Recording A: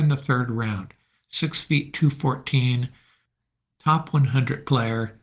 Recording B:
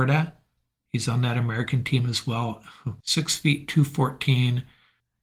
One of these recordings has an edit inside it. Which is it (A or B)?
B